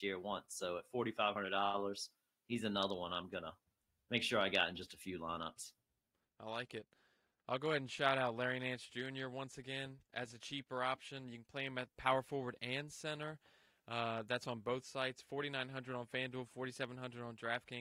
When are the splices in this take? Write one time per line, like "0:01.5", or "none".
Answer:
none